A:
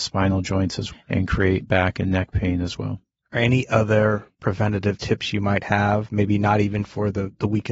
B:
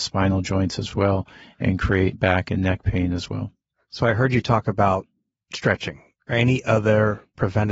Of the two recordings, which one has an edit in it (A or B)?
A